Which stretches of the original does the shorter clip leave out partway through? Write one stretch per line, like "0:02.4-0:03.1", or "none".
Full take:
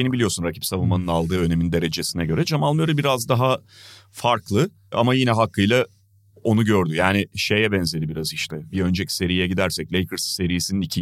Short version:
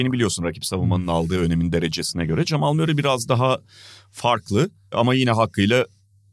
none